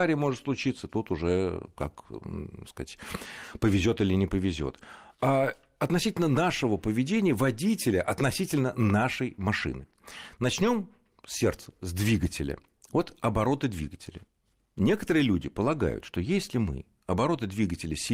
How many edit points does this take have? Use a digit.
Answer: 0